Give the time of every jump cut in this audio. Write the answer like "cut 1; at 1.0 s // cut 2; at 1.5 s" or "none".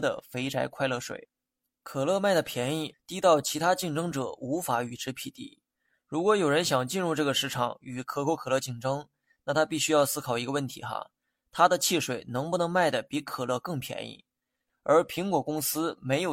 cut 1; at 2.9 s // cut 2; at 14.7 s